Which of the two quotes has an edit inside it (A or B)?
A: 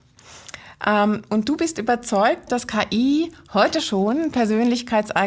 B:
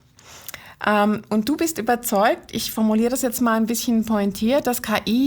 A